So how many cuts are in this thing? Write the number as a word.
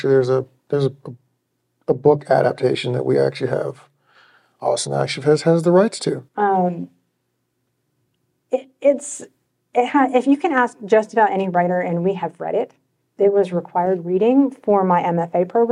two